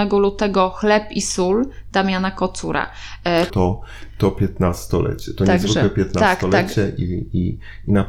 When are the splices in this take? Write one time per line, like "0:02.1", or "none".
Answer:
0:03.5